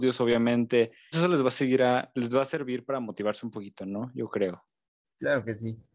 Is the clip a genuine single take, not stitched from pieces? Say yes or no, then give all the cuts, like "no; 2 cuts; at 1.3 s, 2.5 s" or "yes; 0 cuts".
no; 1 cut; at 1.1 s